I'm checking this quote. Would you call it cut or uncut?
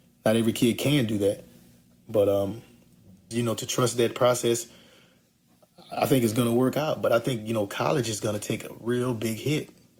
cut